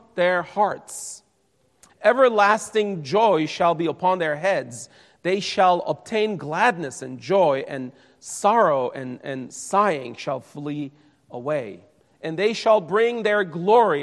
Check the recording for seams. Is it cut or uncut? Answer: cut